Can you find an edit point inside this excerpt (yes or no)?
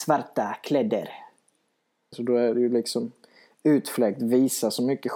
yes